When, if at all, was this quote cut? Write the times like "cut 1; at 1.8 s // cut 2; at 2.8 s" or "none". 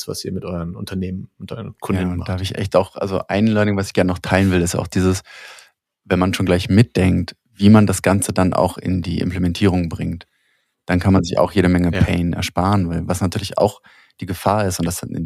none